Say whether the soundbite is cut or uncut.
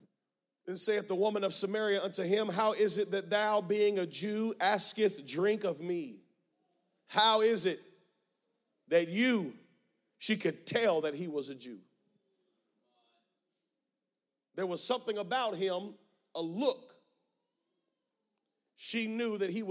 uncut